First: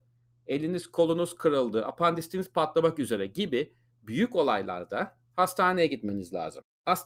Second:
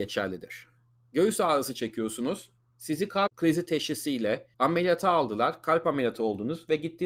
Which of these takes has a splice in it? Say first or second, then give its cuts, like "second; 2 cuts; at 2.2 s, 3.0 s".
second; 2 cuts; at 2.6 s, 4.5 s